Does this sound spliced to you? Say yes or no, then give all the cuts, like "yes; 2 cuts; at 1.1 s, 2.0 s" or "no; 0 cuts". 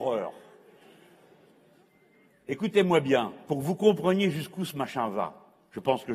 no; 0 cuts